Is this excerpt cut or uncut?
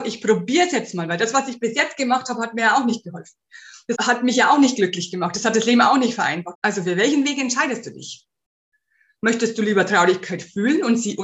cut